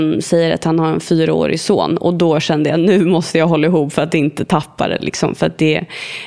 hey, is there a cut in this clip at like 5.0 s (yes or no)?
no